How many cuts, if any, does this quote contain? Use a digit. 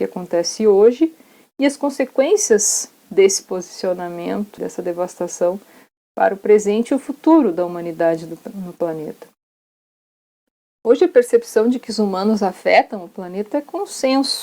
1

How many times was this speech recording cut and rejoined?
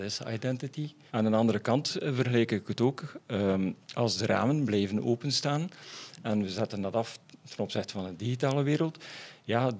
1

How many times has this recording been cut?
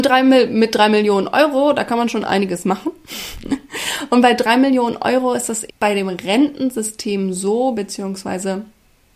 1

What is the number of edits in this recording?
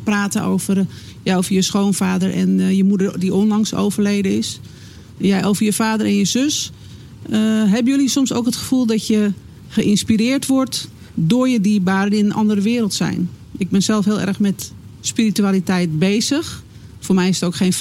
0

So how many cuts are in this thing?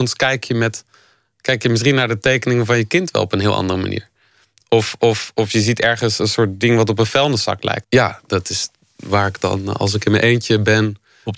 1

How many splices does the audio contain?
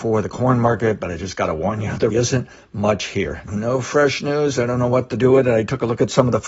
2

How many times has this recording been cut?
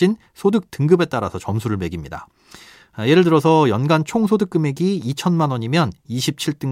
0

